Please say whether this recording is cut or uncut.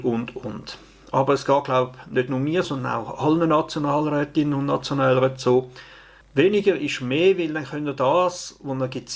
cut